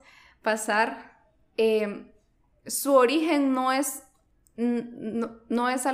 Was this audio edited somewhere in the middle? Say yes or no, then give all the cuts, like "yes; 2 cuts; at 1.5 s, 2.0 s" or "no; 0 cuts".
no; 0 cuts